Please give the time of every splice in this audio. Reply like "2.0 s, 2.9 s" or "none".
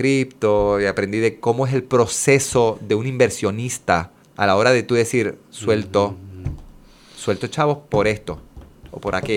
4.2 s

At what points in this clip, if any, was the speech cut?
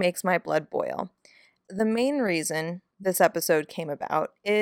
1.6 s, 2.9 s

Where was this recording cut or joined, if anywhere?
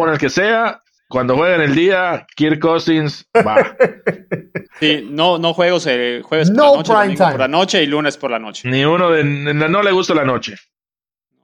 4.7 s

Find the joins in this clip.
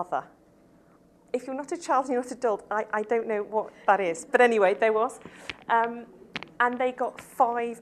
none

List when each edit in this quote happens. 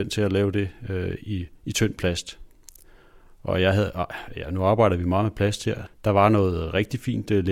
1.6 s, 5.9 s

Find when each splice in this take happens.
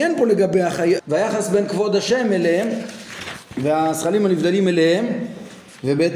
1.0 s

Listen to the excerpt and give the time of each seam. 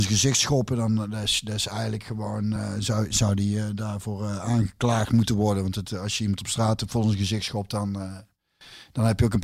none

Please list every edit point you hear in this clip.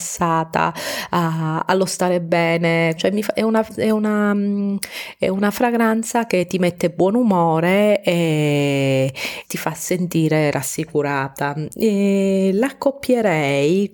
3.0 s, 9.4 s

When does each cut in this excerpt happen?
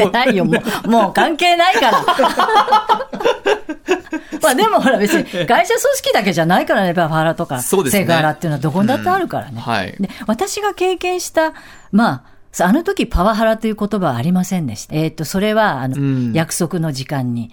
14.9 s, 15.9 s

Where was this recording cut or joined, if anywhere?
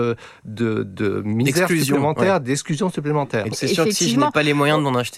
3.5 s

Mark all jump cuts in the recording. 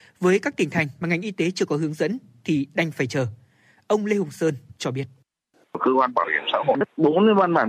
none

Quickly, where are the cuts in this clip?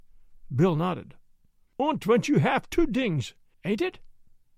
3.5 s

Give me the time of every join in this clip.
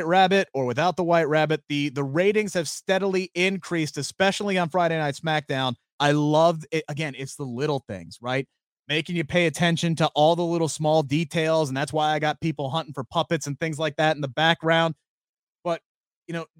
5.9 s

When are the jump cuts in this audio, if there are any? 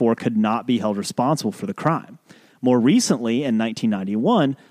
none

